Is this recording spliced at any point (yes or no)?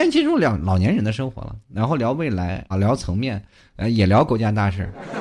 yes